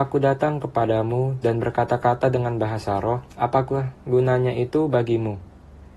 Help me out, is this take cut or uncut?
cut